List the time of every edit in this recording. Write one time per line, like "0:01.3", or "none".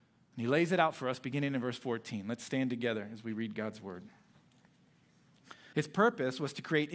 0:05.7